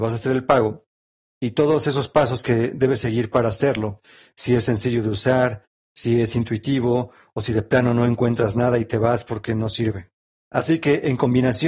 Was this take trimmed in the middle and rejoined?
no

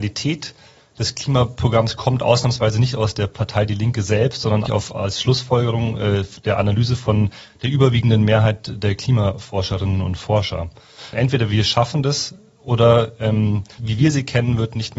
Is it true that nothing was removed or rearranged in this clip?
no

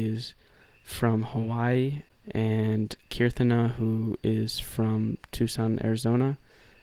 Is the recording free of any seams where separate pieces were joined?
yes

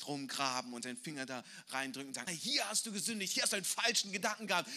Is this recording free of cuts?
no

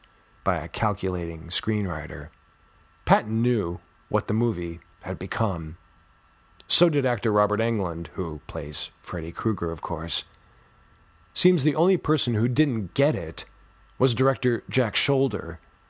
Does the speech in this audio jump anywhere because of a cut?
yes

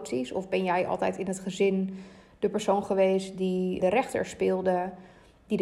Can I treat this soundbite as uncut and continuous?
no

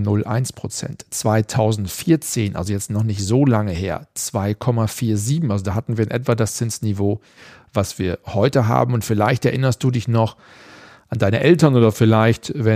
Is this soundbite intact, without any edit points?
yes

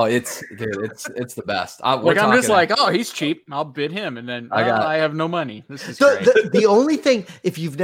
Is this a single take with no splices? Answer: yes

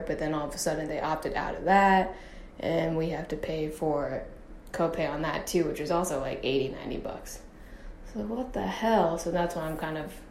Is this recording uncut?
yes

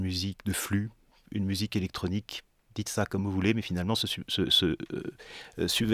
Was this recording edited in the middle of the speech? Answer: no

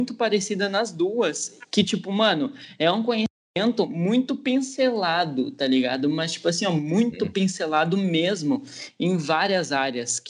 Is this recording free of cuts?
yes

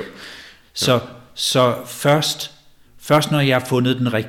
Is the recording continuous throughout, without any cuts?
no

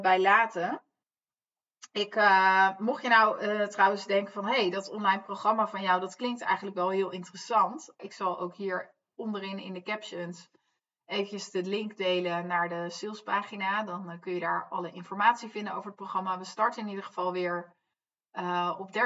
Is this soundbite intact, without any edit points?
no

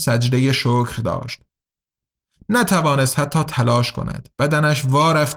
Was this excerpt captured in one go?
no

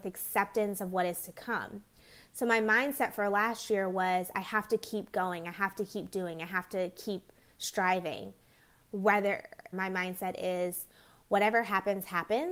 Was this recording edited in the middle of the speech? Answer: yes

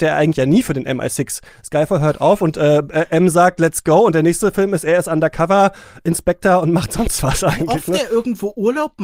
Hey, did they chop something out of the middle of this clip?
no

